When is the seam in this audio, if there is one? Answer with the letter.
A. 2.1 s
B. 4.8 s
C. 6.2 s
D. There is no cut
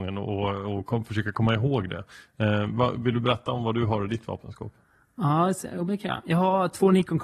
D